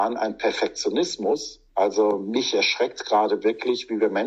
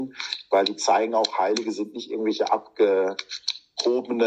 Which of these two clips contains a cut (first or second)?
first